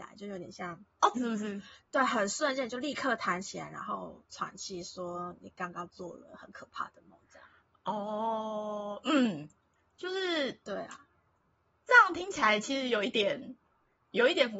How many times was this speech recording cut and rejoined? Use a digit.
1